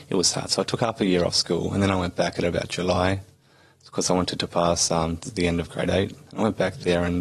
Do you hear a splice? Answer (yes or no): no